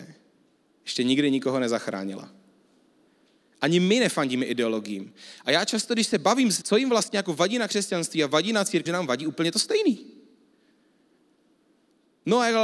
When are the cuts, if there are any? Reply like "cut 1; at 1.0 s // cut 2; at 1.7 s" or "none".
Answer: cut 1; at 6.6 s // cut 2; at 8.9 s

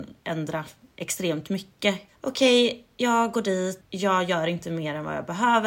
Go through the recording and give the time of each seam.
cut 1; at 2.1 s // cut 2; at 3.8 s

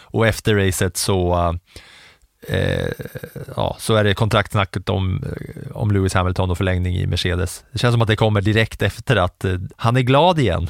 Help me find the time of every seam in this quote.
cut 1; at 9.7 s

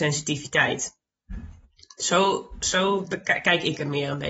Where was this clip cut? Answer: none

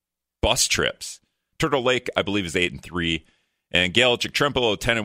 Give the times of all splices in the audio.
cut 1; at 1.5 s

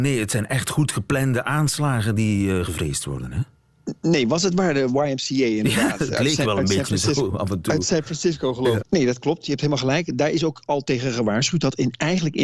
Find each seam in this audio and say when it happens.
cut 1; at 8.8 s

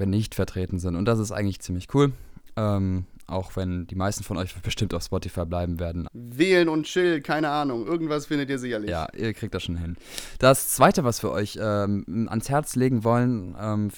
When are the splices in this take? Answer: cut 1; at 6.1 s

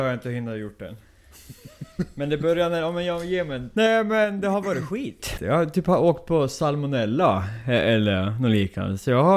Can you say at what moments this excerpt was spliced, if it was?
cut 1; at 3.7 s // cut 2; at 5.4 s

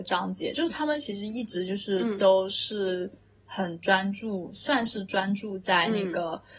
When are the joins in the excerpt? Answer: none

